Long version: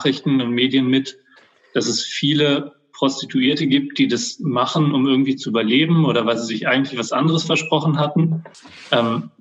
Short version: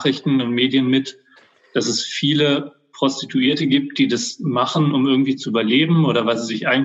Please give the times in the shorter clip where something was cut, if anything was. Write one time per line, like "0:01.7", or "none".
none